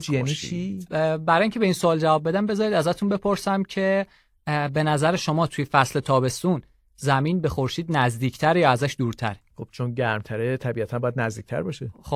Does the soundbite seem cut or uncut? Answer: uncut